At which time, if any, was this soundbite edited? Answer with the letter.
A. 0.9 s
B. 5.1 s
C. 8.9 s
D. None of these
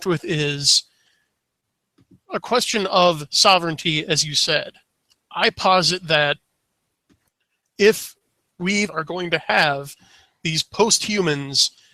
C